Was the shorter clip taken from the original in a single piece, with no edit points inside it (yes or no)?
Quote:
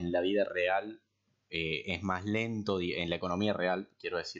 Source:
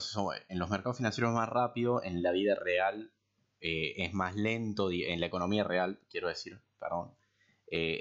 yes